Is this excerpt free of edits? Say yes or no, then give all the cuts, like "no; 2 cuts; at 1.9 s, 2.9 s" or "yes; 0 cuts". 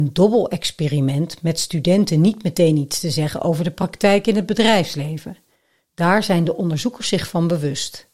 yes; 0 cuts